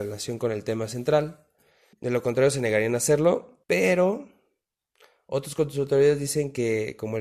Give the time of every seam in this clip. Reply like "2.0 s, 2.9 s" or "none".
1.9 s, 3.6 s